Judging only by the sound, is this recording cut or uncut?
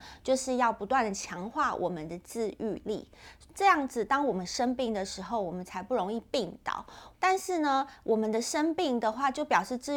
cut